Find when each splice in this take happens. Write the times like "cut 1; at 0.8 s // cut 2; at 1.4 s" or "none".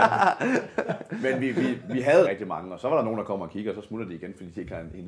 cut 1; at 2.3 s